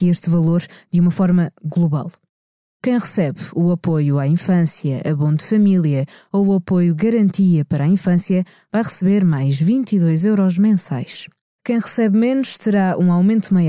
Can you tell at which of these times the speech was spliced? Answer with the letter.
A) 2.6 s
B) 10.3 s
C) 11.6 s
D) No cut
C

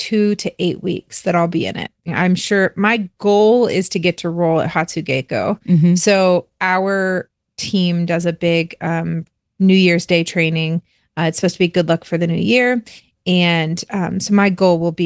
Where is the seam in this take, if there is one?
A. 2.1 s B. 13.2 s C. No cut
A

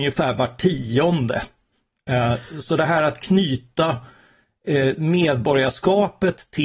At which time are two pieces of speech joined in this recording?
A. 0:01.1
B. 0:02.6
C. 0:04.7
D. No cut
D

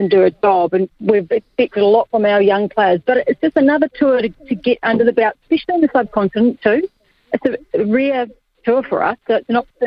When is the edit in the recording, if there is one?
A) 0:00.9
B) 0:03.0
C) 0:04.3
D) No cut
A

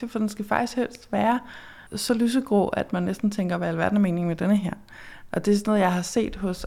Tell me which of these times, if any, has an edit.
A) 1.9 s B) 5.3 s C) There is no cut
A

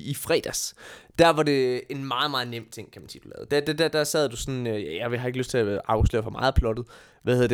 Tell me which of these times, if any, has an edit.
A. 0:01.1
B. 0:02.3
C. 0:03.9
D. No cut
C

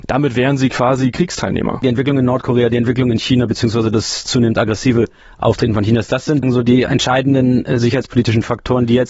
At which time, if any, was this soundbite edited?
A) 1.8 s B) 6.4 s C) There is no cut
B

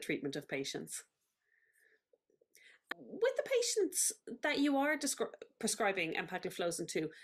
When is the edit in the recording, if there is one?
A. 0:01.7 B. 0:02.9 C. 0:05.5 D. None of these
B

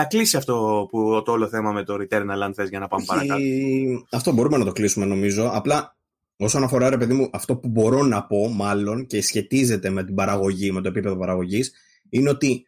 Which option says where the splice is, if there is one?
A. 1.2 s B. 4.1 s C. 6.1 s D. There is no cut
D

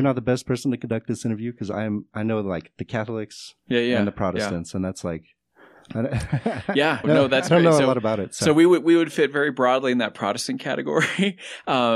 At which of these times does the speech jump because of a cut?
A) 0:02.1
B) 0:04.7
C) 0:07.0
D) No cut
C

